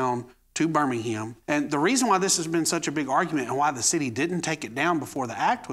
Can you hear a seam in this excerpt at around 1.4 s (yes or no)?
yes